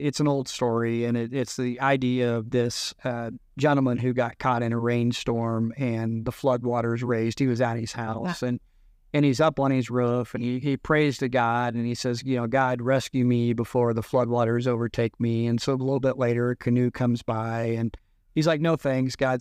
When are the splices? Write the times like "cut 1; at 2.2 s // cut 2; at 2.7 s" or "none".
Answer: none